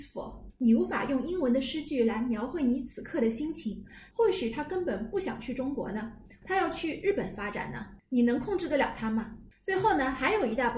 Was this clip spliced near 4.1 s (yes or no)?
yes